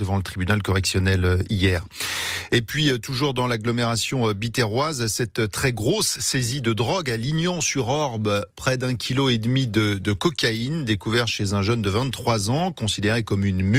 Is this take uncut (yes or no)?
yes